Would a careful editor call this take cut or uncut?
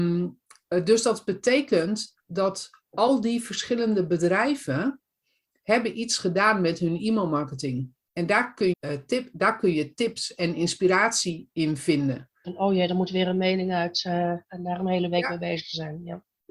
cut